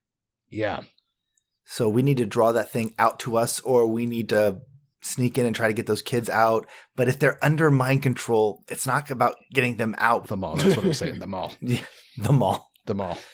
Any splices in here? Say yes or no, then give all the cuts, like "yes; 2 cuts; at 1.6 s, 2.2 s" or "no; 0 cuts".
yes; 1 cut; at 10.2 s